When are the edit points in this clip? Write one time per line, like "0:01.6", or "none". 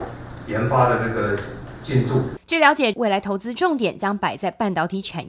0:02.9